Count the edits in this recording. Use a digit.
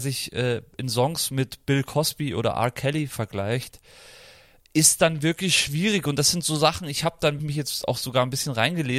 1